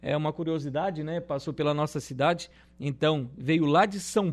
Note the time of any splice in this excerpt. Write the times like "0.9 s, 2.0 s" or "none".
none